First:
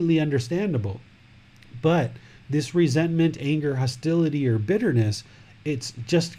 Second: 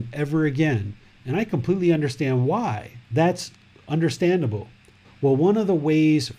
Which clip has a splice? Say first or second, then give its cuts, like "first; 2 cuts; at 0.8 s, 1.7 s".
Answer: second; 1 cut; at 5.0 s